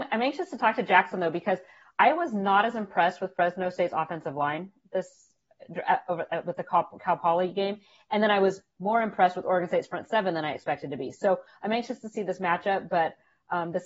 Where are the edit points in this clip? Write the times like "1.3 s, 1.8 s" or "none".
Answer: none